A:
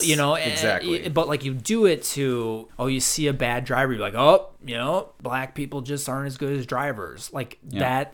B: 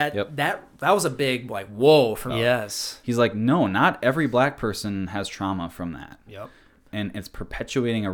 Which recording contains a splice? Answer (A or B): B